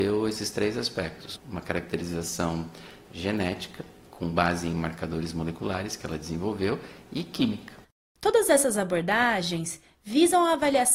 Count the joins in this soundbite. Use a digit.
1